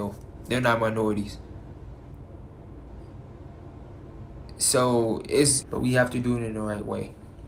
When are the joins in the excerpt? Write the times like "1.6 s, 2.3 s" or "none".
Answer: 5.6 s